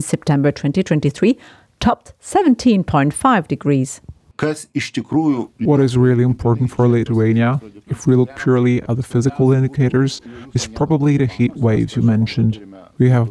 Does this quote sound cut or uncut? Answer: uncut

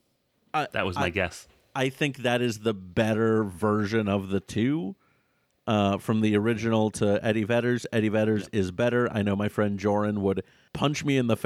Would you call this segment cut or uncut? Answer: uncut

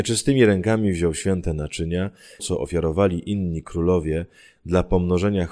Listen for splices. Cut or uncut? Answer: cut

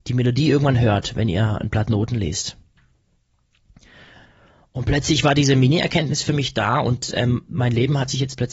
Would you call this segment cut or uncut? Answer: uncut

